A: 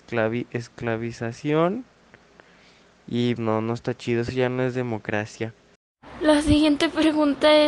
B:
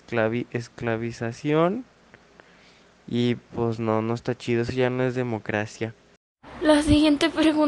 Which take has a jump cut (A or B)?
A